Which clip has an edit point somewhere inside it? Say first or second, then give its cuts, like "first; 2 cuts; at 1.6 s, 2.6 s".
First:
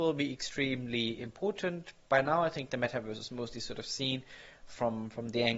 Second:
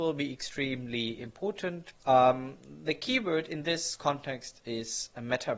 second; 1 cut; at 1.9 s